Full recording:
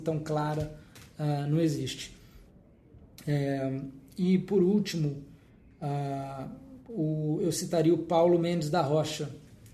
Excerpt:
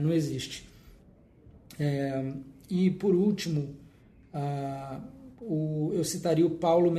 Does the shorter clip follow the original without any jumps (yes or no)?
yes